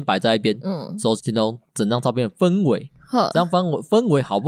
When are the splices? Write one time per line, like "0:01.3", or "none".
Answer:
0:01.2